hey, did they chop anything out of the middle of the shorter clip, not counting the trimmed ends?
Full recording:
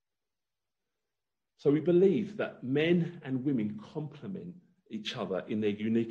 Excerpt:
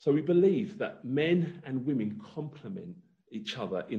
no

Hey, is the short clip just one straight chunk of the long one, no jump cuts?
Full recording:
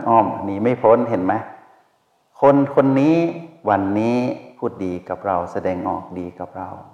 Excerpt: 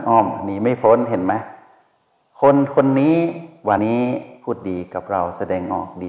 no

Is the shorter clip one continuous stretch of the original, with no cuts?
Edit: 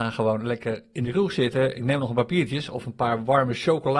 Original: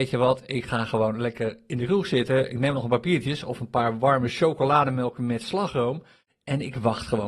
yes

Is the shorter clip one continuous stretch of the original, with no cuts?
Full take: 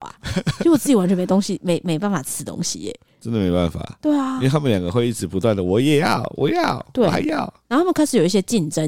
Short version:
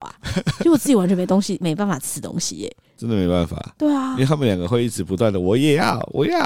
no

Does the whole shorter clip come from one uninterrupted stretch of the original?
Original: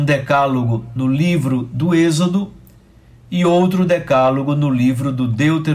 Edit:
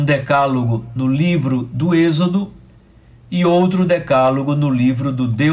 yes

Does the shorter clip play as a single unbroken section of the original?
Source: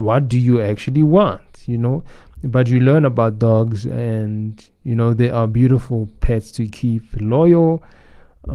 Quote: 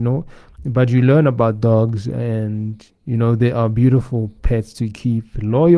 yes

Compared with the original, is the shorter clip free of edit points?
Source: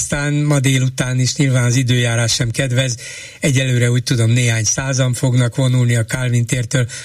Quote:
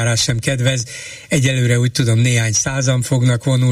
yes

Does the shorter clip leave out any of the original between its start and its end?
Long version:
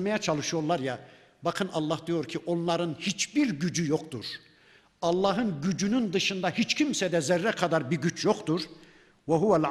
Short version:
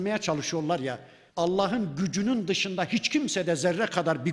yes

